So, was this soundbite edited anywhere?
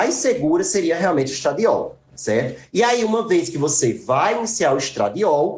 no; 0 cuts

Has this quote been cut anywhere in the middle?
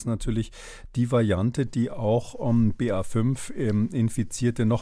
no; 0 cuts

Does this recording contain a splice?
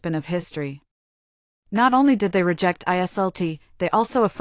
no; 0 cuts

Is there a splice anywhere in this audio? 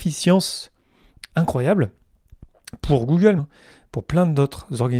yes; 2 cuts; at 1.3 s, 3.4 s

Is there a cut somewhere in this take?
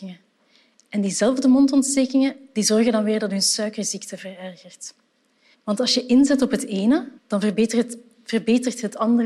yes; 2 cuts; at 5.5 s, 7.2 s

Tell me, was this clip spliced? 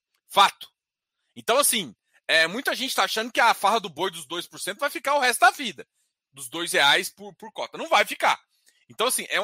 no; 0 cuts

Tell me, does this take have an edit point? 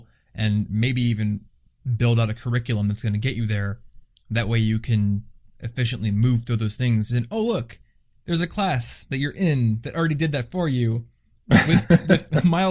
no; 0 cuts

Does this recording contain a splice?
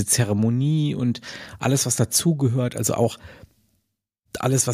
no; 0 cuts

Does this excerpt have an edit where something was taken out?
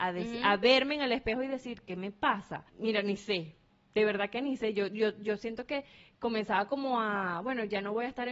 yes; 1 cut; at 2.7 s

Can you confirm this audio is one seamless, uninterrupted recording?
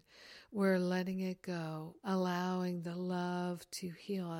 no; 1 cut; at 2.0 s

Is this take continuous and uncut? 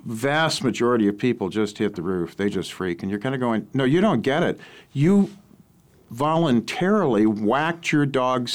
yes; 0 cuts

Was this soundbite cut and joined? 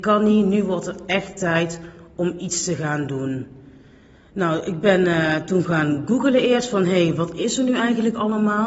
no; 0 cuts

